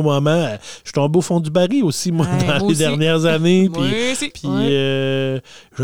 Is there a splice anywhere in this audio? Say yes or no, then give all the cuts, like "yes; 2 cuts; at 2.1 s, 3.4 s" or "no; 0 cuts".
yes; 1 cut; at 4.3 s